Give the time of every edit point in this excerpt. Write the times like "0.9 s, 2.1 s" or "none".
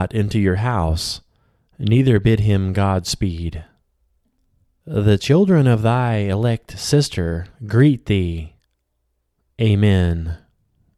4.8 s

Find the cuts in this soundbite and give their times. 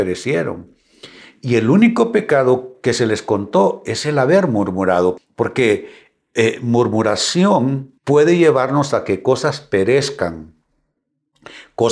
5.2 s, 8.0 s

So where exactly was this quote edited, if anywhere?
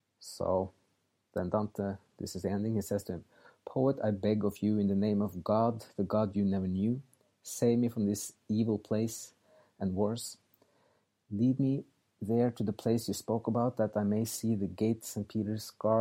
none

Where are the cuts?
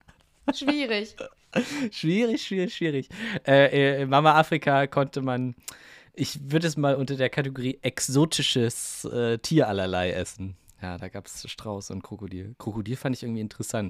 none

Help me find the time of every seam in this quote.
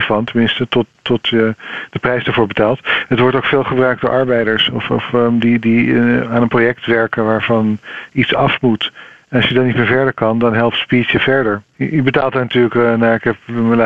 11.7 s

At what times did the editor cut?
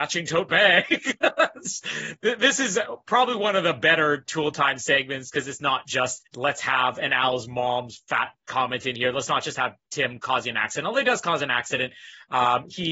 6.3 s

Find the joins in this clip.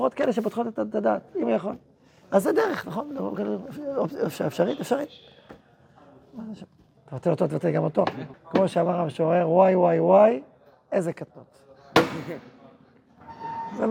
7.0 s, 8.3 s

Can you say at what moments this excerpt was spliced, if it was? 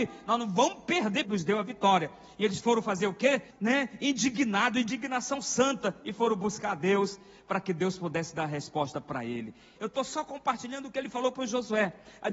1.2 s, 3.5 s, 9.8 s

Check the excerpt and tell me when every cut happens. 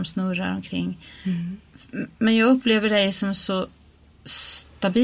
none

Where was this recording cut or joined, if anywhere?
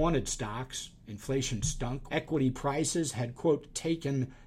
2.1 s

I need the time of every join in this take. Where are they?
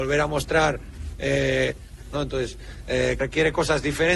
2.1 s, 3.2 s

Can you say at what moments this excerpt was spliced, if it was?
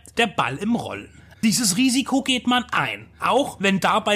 1.3 s

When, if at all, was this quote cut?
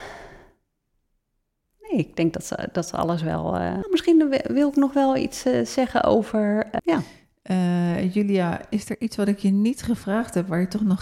3.8 s, 6.8 s

